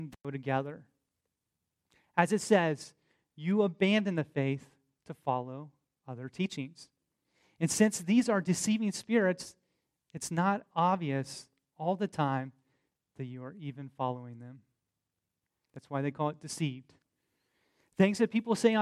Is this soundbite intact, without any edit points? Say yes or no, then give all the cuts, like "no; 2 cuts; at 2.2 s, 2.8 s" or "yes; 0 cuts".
yes; 0 cuts